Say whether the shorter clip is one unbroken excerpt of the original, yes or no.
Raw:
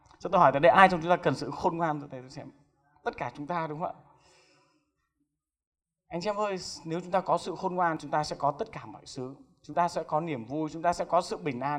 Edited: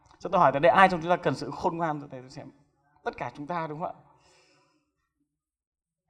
yes